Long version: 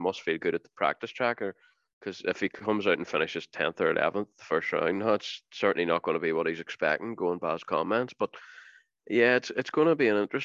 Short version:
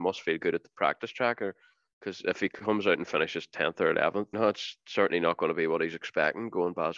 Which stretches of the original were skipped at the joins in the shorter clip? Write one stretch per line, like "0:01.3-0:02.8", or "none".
0:04.3-0:05.0